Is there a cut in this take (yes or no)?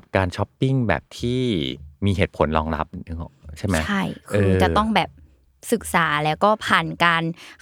no